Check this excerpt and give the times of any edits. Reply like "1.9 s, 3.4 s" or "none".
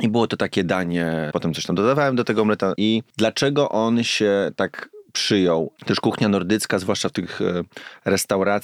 1.3 s, 2.8 s, 5.8 s

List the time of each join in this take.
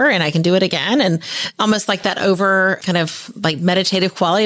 none

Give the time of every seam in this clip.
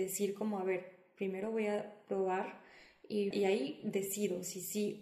3.3 s

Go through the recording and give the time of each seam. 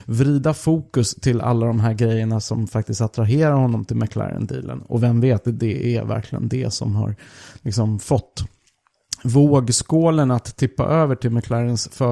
5.4 s, 6.7 s

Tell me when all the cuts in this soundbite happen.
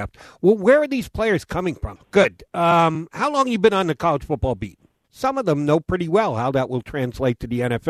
2.0 s, 5.0 s

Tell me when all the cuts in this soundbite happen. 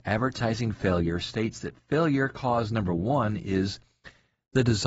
none

